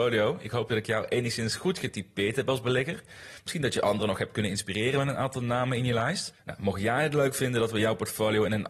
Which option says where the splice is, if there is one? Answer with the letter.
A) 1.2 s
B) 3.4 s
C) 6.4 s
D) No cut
C